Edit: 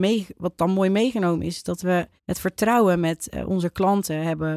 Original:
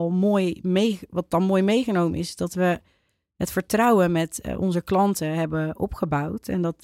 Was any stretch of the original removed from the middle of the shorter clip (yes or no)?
yes